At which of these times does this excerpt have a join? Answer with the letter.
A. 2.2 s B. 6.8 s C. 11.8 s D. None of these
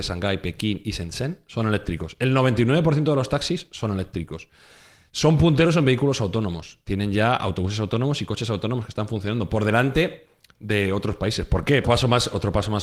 C